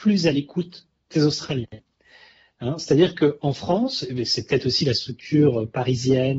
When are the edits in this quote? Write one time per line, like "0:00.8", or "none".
none